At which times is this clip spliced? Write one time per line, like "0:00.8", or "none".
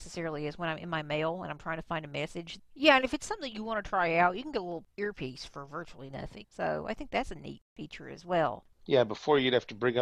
0:02.6
0:06.4
0:08.7